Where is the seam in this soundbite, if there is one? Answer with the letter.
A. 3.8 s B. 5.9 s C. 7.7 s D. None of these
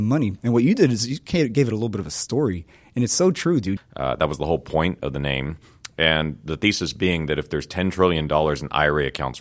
A